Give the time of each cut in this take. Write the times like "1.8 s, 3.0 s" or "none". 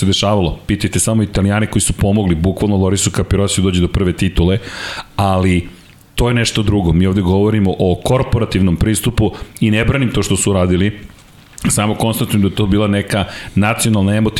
none